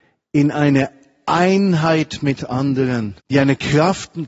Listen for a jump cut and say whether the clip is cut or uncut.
cut